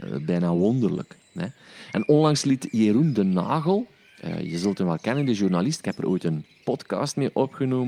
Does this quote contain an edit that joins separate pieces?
no; 0 cuts

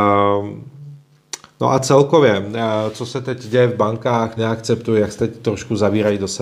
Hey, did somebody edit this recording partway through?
yes; 1 cut; at 4.4 s

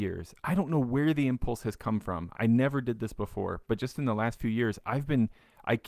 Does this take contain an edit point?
no; 0 cuts

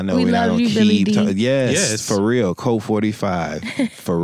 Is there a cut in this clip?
no; 0 cuts

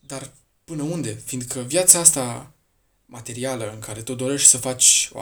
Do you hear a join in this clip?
no; 0 cuts

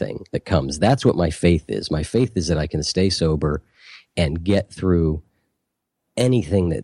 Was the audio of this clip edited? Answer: no; 0 cuts

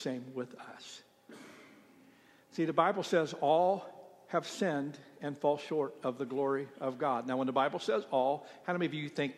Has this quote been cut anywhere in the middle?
no; 0 cuts

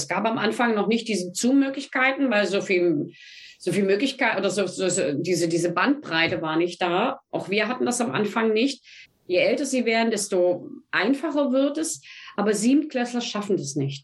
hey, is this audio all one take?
no; 1 cut; at 9.1 s

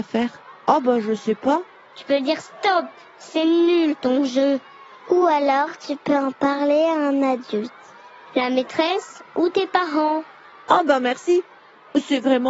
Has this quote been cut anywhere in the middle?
no; 0 cuts

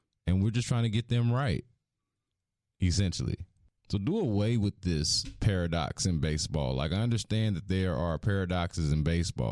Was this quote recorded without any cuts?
yes; 0 cuts

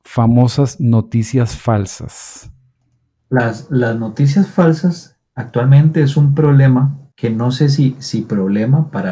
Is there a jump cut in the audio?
no; 0 cuts

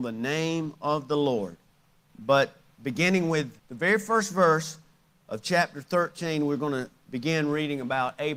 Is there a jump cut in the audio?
yes; 2 cuts; at 2.1 s, 3.6 s

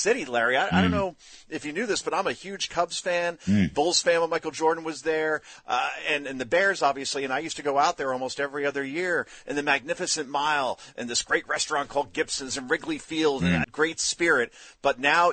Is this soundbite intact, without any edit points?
no; 1 cut; at 13.6 s

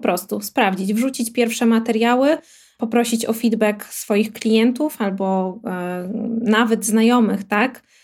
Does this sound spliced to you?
no; 0 cuts

